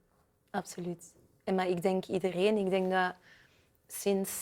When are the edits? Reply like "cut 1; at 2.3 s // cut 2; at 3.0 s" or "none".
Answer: none